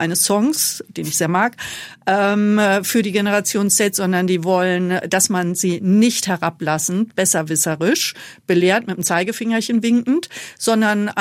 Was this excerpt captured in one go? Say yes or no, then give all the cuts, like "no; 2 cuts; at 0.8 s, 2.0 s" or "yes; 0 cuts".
yes; 0 cuts